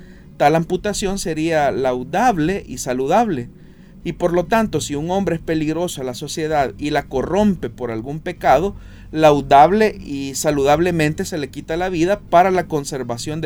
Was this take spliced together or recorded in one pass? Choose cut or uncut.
cut